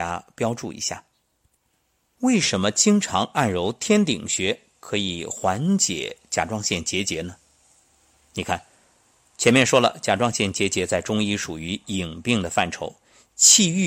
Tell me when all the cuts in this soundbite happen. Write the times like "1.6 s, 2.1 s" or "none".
none

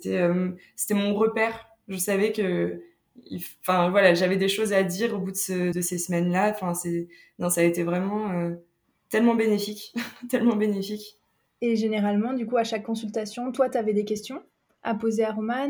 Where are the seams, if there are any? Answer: 5.7 s

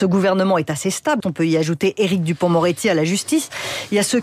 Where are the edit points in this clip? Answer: 1.2 s

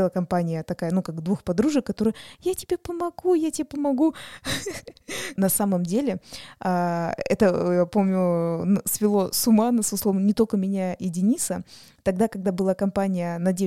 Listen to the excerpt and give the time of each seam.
5.4 s

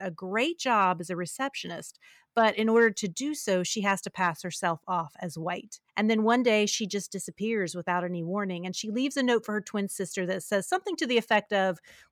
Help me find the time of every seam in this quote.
5.9 s

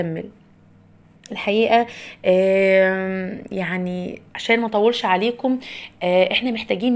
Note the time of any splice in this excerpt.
4.3 s

